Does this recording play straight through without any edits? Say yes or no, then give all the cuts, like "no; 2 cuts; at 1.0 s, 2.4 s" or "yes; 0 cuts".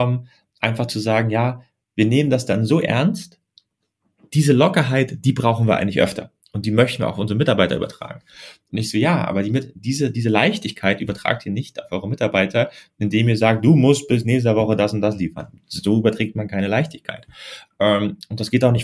yes; 0 cuts